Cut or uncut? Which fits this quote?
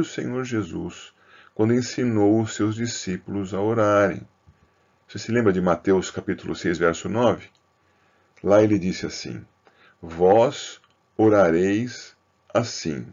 uncut